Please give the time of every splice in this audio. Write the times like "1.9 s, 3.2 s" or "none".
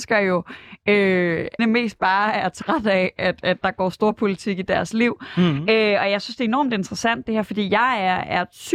1.6 s